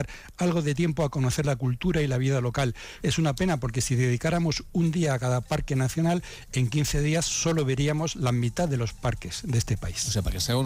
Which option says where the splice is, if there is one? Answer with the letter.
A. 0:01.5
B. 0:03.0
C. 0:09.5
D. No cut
B